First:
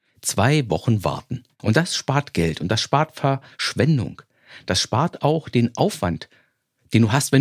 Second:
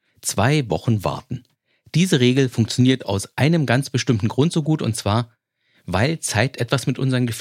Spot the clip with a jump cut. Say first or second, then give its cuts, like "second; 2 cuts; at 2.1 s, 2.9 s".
first; 1 cut; at 1.6 s